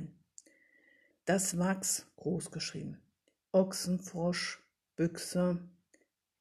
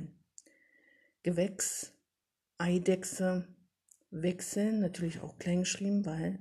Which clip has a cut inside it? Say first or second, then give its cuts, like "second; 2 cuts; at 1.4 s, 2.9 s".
first; 1 cut; at 1.1 s